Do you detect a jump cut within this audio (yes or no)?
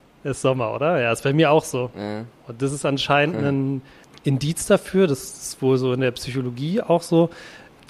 no